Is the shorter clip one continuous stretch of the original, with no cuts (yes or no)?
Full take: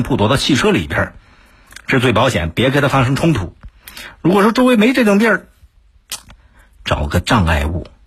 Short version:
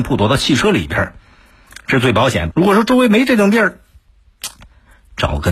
no